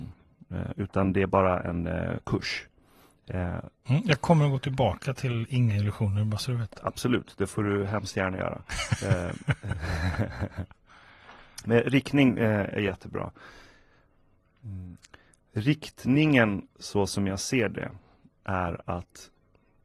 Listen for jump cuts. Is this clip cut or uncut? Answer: cut